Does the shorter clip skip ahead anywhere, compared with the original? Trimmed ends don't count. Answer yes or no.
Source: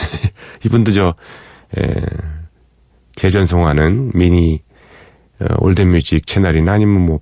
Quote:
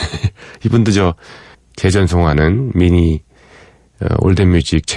yes